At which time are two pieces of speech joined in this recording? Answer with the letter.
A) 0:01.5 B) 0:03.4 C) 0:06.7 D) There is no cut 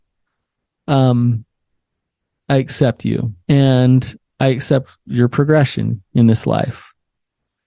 B